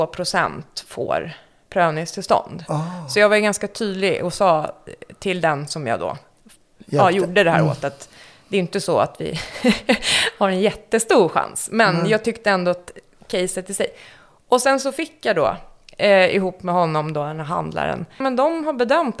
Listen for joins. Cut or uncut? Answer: cut